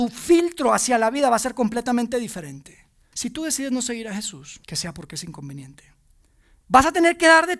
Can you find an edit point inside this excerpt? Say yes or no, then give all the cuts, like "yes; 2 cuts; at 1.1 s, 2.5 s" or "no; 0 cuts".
yes; 3 cuts; at 3.1 s, 4.6 s, 6.6 s